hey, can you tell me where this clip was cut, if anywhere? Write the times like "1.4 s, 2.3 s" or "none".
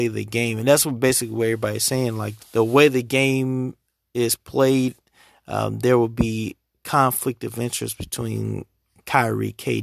2.4 s